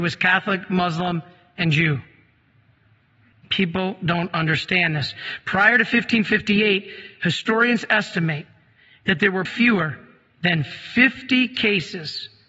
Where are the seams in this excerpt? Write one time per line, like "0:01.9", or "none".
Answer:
0:03.3
0:09.5